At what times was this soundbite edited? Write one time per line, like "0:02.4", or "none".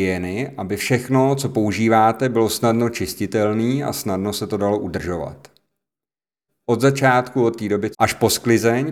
0:06.5
0:07.9